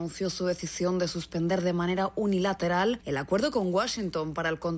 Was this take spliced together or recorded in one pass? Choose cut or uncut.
uncut